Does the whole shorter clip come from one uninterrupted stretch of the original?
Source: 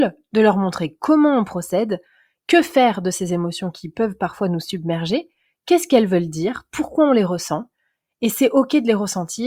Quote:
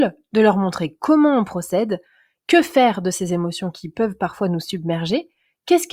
yes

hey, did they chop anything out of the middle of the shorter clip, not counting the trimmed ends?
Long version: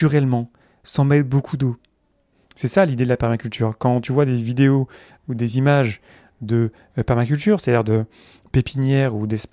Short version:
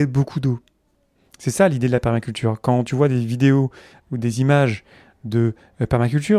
no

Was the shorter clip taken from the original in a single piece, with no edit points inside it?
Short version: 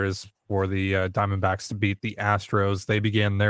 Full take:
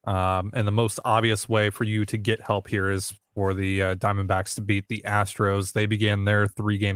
yes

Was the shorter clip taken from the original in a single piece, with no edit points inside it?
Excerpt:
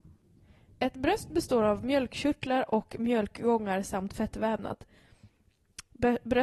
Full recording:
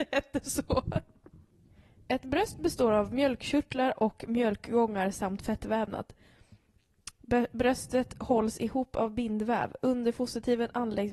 yes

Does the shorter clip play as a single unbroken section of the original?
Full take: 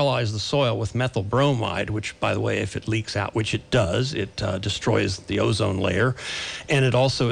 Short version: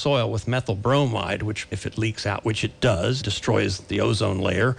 no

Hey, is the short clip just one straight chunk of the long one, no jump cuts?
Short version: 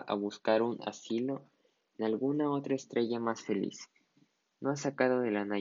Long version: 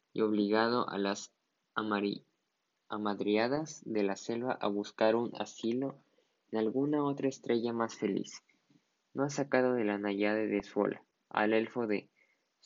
yes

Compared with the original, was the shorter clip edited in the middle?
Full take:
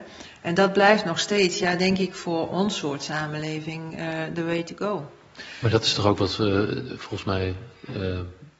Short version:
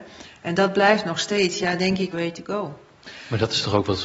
yes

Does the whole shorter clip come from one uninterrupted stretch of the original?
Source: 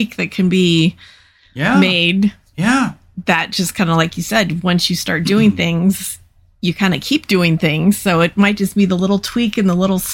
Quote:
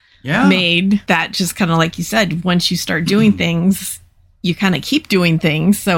no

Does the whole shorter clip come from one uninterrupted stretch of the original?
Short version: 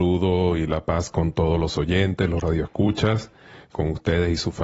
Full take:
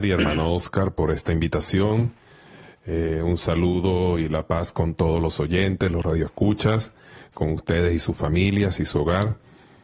yes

